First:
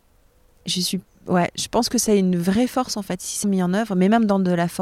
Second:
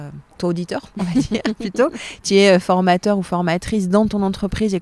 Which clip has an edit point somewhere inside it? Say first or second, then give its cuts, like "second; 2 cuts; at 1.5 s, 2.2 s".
first; 1 cut; at 3.4 s